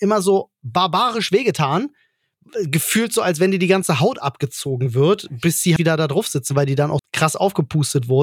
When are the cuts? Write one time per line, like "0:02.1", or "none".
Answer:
0:05.8
0:07.0